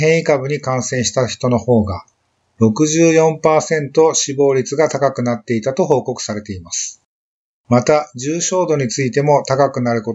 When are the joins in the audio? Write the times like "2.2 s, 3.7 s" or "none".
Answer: 7.5 s